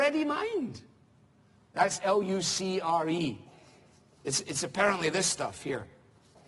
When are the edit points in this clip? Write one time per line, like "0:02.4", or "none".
0:01.5